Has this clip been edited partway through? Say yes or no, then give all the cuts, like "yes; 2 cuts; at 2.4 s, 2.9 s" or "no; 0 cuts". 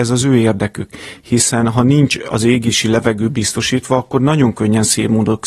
no; 0 cuts